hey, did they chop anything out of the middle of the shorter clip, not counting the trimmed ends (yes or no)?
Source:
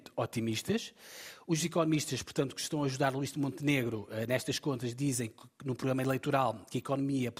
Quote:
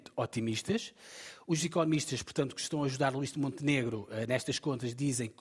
no